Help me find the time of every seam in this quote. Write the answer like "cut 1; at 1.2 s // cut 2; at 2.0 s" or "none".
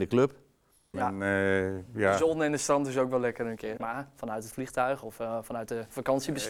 cut 1; at 0.9 s // cut 2; at 3.8 s